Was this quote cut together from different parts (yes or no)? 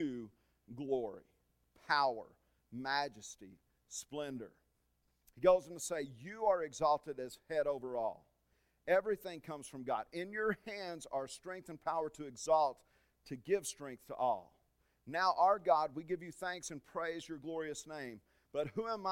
no